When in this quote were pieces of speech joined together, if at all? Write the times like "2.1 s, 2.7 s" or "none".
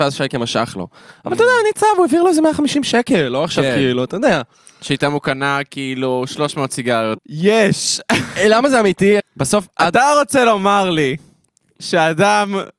7.2 s, 9.2 s